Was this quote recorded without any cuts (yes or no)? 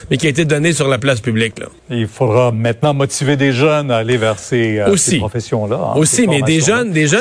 no